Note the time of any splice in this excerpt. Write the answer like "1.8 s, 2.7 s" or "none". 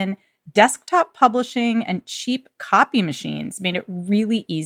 none